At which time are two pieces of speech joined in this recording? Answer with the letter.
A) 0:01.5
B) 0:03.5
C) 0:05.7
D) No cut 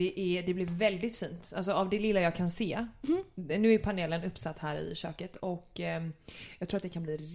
D